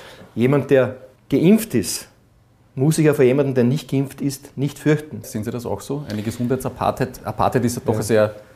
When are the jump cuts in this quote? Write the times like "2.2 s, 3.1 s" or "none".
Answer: 1.2 s, 5.2 s